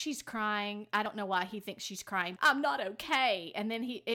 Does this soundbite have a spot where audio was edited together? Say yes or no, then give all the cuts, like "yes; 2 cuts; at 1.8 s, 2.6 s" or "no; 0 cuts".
yes; 1 cut; at 2.4 s